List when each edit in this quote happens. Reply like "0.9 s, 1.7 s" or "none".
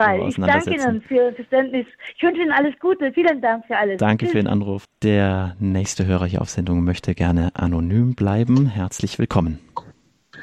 4.9 s